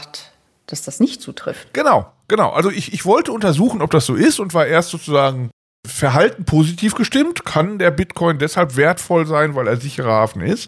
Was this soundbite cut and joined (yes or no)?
no